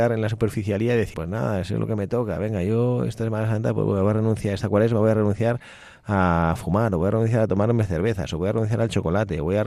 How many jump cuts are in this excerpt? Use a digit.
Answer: 1